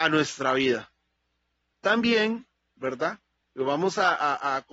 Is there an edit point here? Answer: yes; 2 cuts; at 1.7 s, 3.4 s

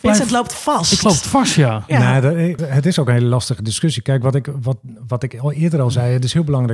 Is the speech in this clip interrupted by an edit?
yes; 1 cut; at 2.6 s

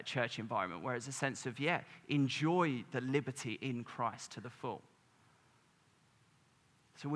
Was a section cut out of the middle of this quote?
no; 0 cuts

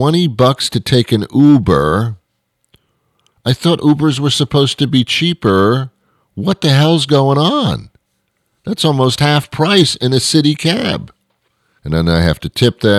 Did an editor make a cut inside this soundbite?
yes; 1 cut; at 11.8 s

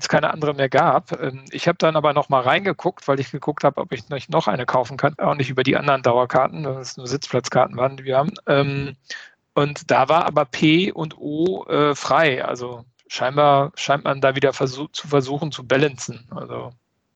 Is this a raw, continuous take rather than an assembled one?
no; 1 cut; at 5.1 s

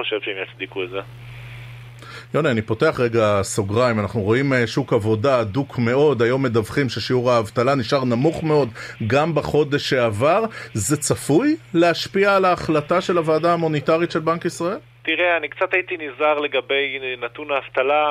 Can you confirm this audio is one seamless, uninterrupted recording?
yes; 0 cuts

